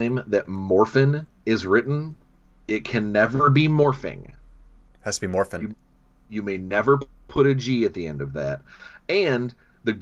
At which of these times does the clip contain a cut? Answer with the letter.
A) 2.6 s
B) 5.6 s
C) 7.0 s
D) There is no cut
D